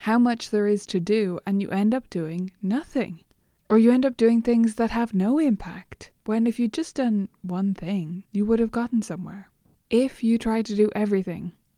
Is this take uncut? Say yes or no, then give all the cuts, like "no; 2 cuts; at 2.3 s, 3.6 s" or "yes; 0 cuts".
no; 3 cuts; at 6.2 s, 8.3 s, 9.7 s